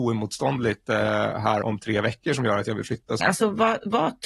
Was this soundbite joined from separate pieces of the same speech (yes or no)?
yes